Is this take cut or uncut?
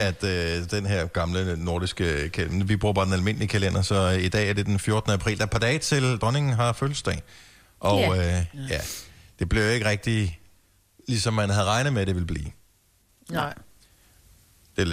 uncut